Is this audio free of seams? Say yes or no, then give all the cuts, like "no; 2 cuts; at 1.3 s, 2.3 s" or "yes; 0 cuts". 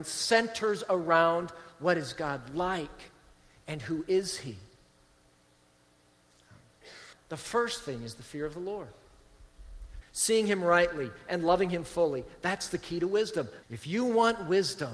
no; 3 cuts; at 7.1 s, 10.0 s, 13.6 s